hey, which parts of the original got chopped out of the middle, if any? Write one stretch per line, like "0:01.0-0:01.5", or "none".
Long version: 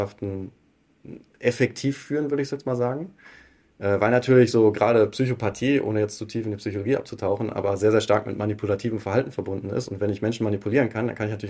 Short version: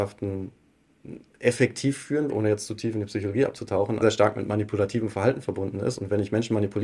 0:02.3-0:05.8
0:07.5-0:07.9